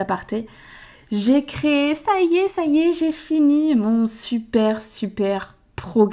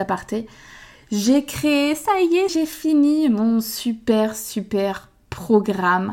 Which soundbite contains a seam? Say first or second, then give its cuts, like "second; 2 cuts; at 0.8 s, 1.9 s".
second; 1 cut; at 2.5 s